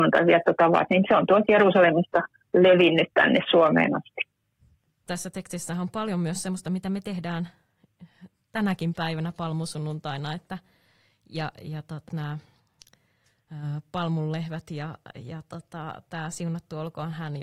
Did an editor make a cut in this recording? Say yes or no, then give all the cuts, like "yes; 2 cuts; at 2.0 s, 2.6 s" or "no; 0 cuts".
yes; 2 cuts; at 5.1 s, 12.1 s